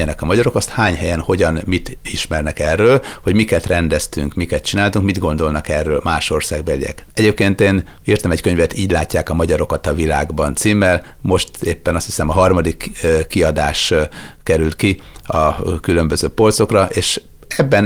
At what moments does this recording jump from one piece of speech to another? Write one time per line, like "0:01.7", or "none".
0:07.0